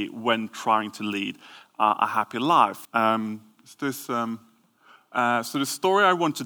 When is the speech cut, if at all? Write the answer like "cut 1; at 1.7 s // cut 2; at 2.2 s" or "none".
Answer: cut 1; at 2.8 s